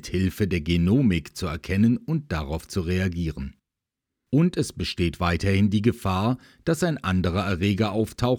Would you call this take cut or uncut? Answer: cut